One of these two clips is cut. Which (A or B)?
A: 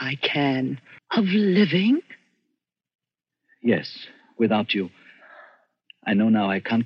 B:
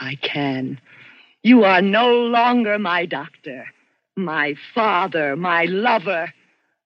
A